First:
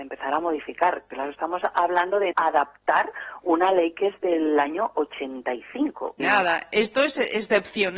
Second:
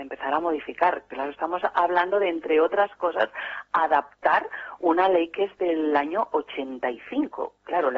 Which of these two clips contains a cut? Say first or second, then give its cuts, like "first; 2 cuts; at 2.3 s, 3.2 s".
first; 2 cuts; at 2.3 s, 6.2 s